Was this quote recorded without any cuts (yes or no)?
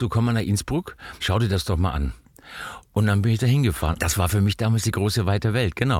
no